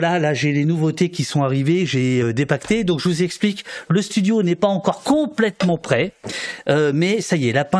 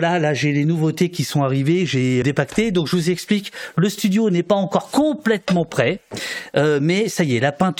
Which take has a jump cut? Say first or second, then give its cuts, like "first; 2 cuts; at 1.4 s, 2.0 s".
second; 1 cut; at 2.2 s